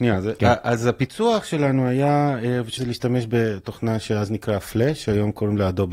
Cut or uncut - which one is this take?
cut